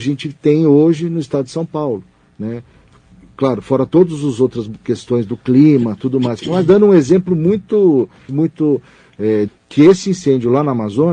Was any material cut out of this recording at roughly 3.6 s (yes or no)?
no